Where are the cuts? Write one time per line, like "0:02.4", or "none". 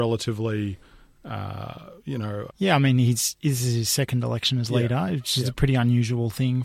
0:02.5